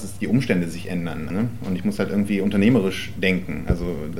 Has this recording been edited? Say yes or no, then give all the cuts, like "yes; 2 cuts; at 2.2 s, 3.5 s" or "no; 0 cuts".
yes; 1 cut; at 1.3 s